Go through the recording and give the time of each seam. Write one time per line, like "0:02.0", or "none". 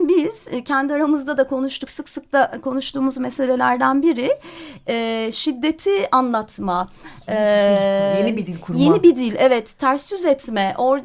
none